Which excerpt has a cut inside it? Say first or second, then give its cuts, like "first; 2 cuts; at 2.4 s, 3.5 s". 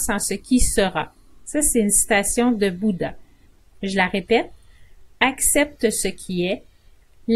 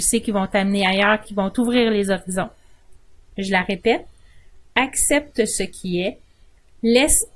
second; 2 cuts; at 1.2 s, 3.3 s